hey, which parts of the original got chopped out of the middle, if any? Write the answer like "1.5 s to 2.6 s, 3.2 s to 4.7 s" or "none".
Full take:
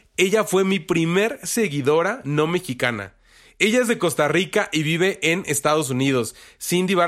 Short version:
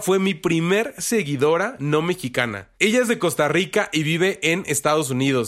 3.2 s to 3.5 s